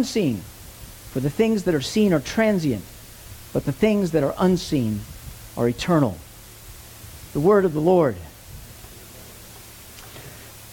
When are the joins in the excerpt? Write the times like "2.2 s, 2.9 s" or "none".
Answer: none

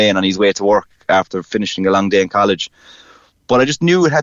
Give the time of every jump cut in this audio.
none

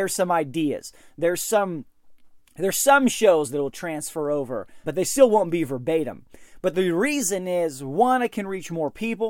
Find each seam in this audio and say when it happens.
4.8 s

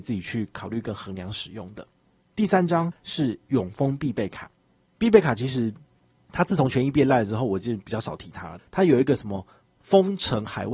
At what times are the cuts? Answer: 8.6 s

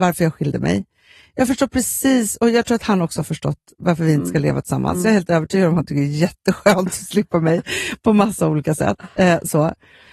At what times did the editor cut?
none

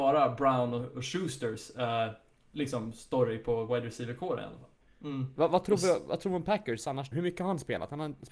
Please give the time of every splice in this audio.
4.8 s, 7.1 s

